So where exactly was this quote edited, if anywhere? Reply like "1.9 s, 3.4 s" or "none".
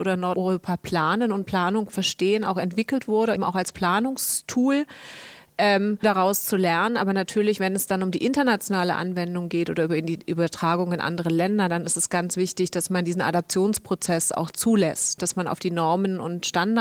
3.4 s, 6.0 s, 15.2 s